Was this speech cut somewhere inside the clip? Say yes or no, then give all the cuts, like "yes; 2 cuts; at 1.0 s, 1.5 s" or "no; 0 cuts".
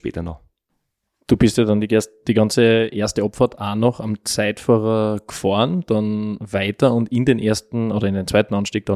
no; 0 cuts